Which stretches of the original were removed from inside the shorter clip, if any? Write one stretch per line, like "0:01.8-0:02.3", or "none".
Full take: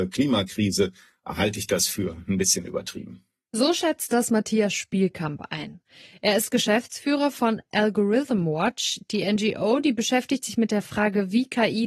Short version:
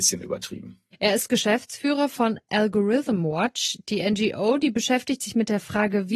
0:03.4-0:06.1